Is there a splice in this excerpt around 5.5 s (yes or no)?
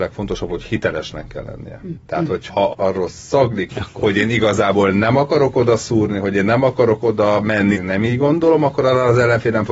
no